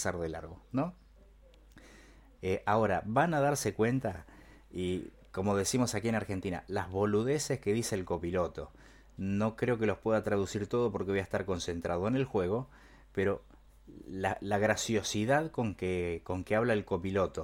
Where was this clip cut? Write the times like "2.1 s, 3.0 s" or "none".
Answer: 2.3 s